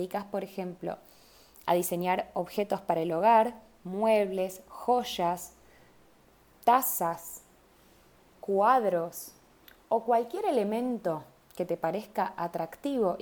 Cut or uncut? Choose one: uncut